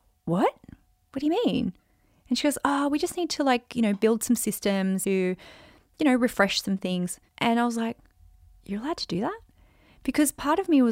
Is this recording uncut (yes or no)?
no